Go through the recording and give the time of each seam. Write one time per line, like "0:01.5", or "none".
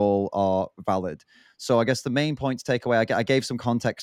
none